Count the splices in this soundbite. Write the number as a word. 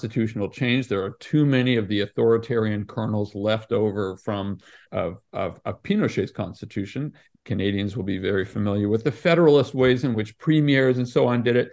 two